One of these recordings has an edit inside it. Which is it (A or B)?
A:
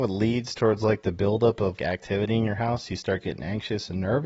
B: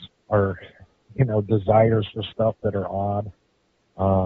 A